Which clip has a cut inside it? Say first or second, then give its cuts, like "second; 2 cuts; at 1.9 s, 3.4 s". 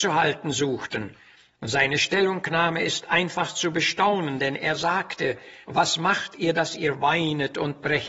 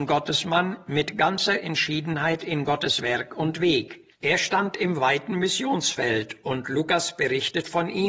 second; 1 cut; at 4.1 s